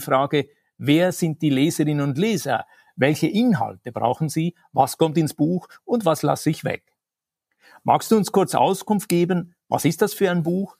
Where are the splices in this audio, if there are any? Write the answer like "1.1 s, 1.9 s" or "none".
none